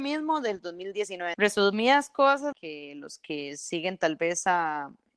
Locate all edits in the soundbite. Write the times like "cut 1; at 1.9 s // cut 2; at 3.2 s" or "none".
cut 1; at 1.3 s // cut 2; at 2.5 s